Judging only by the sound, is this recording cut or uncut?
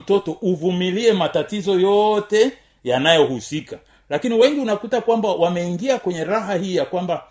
uncut